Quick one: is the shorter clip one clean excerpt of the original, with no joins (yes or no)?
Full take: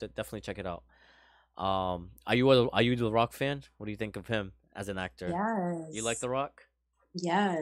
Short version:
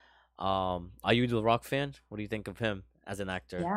no